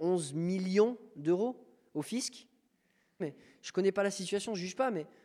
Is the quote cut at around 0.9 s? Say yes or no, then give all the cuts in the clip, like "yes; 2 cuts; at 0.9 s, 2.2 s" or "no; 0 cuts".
no; 1 cut; at 3.2 s